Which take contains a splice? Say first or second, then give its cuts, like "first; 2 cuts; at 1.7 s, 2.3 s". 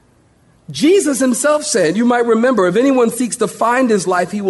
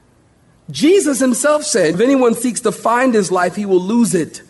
second; 1 cut; at 1.9 s